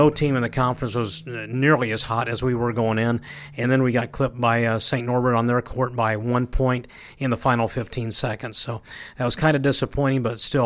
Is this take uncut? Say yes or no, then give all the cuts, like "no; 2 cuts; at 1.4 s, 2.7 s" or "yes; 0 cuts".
yes; 0 cuts